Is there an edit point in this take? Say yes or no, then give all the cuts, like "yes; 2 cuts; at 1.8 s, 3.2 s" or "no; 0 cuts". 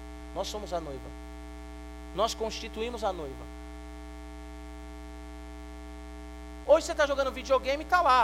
yes; 1 cut; at 6.6 s